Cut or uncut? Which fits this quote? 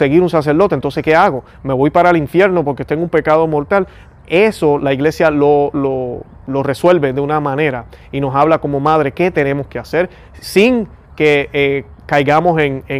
uncut